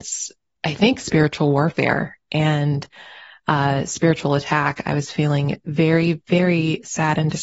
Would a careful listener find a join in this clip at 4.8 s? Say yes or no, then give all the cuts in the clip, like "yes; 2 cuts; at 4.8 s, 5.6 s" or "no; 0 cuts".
no; 0 cuts